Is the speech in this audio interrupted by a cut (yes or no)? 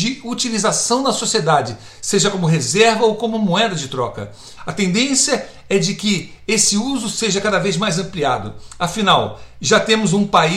yes